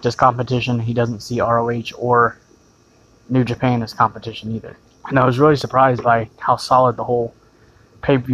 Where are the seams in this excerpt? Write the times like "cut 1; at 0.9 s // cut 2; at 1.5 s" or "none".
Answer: cut 1; at 4.9 s

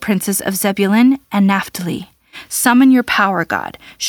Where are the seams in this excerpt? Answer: none

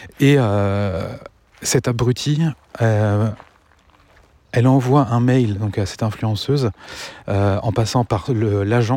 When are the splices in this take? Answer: none

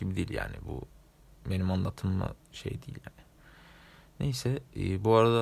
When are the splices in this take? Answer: none

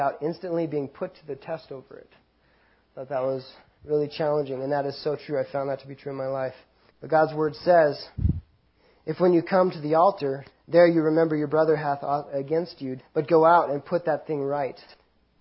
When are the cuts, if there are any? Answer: cut 1; at 6.9 s // cut 2; at 10.5 s // cut 3; at 13.0 s

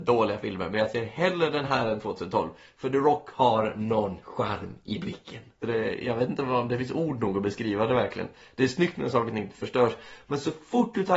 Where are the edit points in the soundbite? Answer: cut 1; at 5.6 s

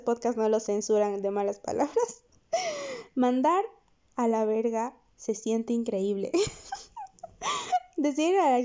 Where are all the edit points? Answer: none

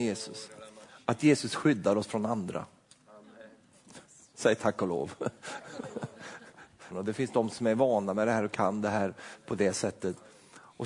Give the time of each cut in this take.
cut 1; at 6.9 s

